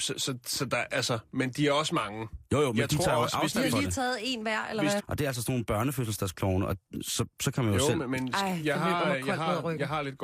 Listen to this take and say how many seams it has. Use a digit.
1